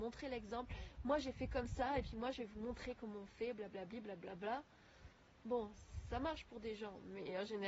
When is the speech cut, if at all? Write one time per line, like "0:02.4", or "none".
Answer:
none